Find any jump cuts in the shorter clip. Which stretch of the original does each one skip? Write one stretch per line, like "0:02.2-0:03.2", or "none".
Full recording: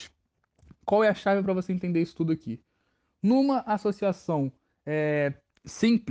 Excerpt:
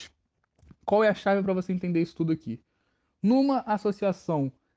none